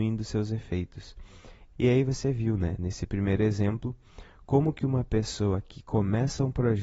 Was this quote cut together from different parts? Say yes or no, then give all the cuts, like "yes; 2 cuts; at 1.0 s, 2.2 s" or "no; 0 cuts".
yes; 1 cut; at 1.7 s